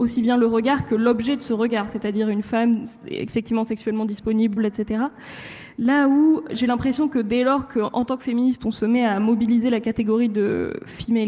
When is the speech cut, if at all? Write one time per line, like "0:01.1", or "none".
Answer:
0:04.6
0:06.5